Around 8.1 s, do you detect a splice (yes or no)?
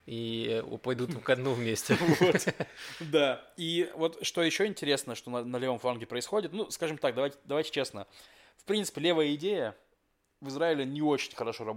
no